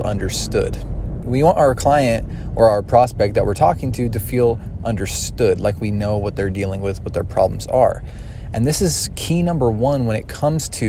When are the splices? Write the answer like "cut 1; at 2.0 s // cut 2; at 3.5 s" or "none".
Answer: cut 1; at 1.2 s